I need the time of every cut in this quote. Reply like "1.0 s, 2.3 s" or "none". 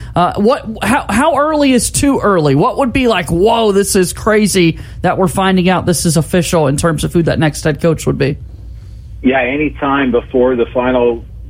none